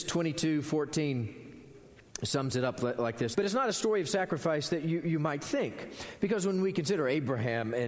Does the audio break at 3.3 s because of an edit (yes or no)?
yes